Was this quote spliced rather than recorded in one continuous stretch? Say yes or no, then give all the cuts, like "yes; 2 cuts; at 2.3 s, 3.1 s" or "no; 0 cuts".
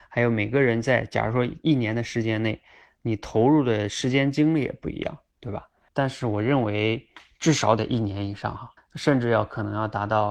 yes; 2 cuts; at 5.9 s, 8.8 s